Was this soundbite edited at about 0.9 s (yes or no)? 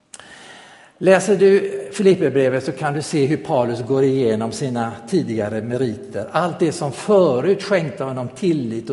no